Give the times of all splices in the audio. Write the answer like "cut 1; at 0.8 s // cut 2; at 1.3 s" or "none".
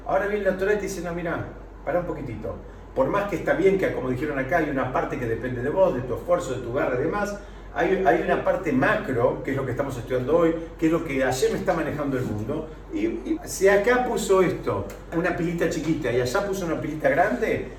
cut 1; at 13.4 s // cut 2; at 15.1 s